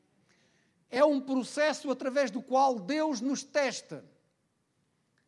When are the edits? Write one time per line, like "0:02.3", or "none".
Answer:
none